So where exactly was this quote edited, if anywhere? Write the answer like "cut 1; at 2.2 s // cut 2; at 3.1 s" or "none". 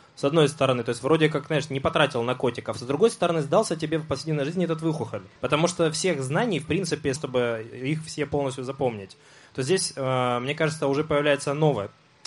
cut 1; at 5.4 s // cut 2; at 7.2 s